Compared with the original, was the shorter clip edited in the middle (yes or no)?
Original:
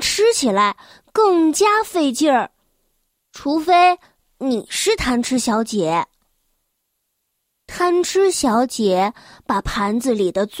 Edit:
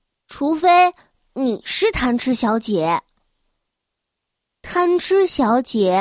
no